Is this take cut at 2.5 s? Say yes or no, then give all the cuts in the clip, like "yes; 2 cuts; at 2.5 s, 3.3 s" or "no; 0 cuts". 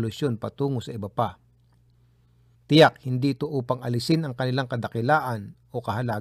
yes; 1 cut; at 2.5 s